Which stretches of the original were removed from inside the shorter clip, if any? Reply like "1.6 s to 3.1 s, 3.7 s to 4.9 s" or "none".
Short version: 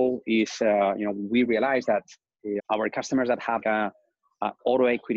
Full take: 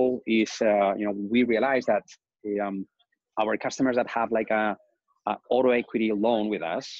2.6 s to 3.3 s, 4.3 s to 4.5 s

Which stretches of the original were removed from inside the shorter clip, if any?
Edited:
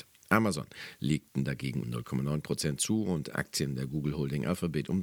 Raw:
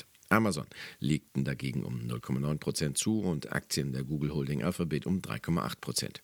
1.8 s to 2.0 s

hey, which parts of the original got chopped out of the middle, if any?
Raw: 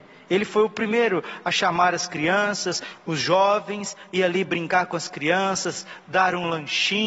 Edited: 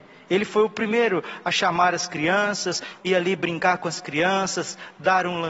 3.0 s to 4.1 s

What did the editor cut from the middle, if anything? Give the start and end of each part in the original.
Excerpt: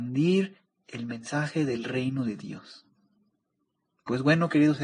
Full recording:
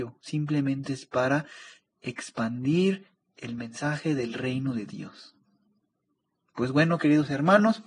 none

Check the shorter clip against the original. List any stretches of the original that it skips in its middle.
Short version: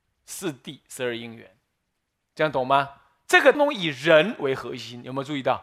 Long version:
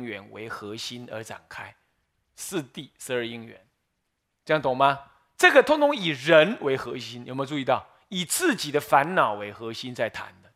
5.6 s to 5.8 s

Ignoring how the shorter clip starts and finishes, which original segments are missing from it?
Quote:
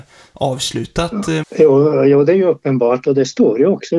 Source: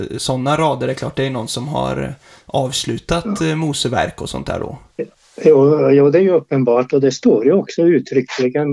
3.5 s to 5.3 s

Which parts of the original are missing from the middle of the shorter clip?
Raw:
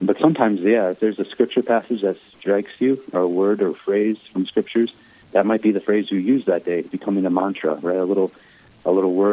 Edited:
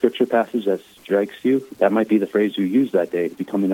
3.1 s to 5.3 s

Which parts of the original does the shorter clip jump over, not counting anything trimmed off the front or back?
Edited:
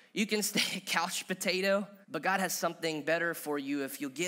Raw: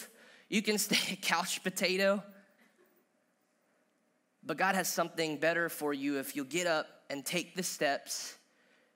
2.4 s to 4.4 s

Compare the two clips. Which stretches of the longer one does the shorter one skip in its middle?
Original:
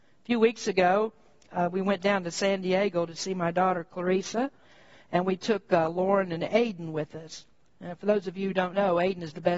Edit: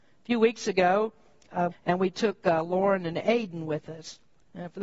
1.7 s to 5.0 s

